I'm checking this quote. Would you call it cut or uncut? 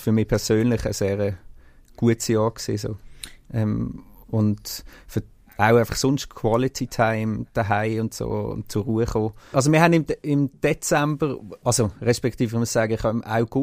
cut